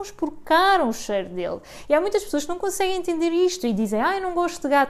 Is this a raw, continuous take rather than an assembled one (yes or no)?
yes